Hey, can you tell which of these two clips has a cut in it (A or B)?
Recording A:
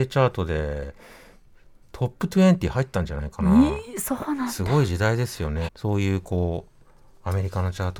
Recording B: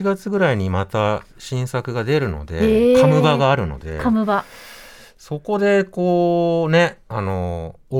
A